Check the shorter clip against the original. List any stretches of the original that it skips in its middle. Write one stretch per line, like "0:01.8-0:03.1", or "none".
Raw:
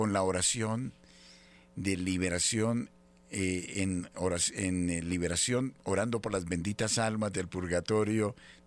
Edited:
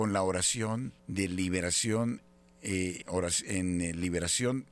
0:01.0-0:01.7
0:03.7-0:04.1

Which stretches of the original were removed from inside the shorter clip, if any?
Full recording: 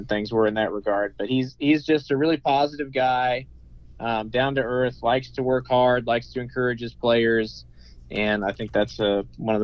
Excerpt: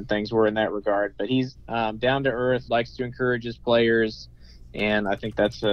0:01.5-0:03.9
0:05.0-0:06.0

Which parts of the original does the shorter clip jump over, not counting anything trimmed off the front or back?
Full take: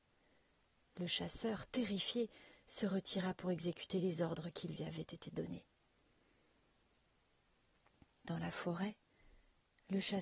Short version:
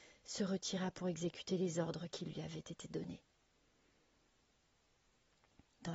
none

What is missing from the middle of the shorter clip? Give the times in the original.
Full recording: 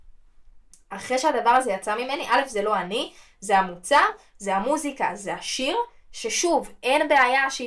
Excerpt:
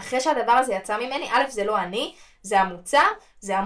none

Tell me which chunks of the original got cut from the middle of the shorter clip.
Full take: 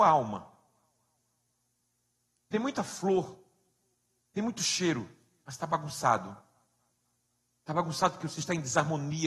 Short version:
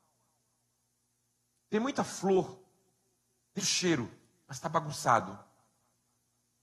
0:04.4-0:04.5

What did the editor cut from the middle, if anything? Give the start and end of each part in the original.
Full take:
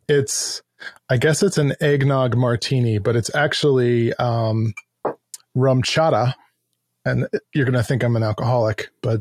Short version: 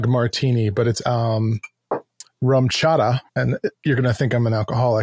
0:03.3-0:04.2
0:06.4-0:07.0

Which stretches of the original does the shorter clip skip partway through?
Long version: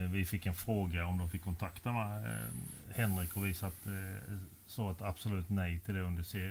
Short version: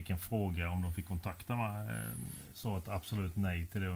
0:02.9-0:04.6

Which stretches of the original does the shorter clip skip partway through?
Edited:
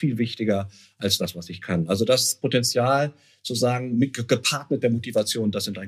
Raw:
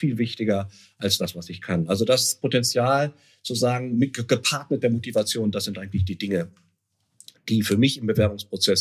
none

